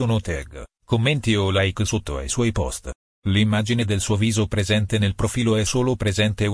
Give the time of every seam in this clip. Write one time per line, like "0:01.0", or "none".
none